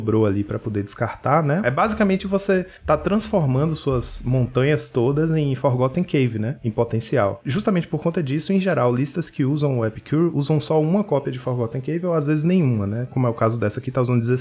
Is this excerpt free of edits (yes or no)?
no